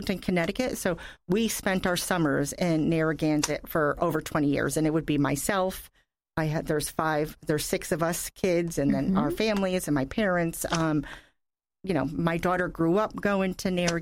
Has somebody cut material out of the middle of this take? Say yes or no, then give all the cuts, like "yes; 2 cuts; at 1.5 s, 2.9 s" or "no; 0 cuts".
no; 0 cuts